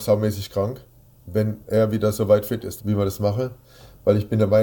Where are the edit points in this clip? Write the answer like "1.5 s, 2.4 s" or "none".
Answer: 2.8 s